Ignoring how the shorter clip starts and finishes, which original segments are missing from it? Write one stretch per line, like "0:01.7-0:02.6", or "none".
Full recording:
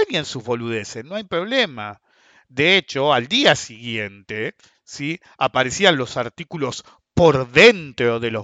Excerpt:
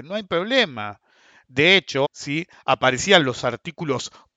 0:03.1-0:04.8